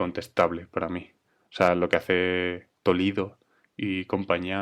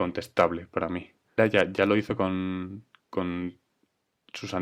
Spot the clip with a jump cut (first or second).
second